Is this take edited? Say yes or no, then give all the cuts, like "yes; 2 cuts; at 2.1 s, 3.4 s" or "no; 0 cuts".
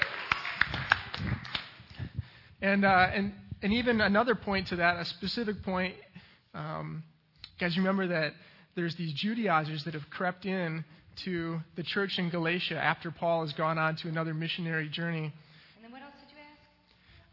yes; 1 cut; at 15.7 s